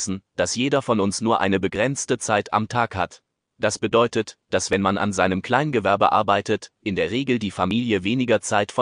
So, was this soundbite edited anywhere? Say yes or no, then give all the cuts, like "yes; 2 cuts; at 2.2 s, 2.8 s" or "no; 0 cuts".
no; 0 cuts